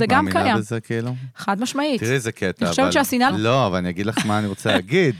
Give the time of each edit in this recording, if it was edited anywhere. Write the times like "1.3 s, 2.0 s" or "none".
3.3 s